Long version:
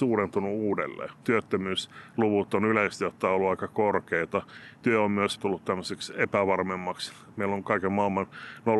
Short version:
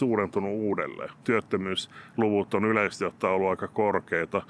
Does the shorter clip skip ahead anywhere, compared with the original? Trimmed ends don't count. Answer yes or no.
no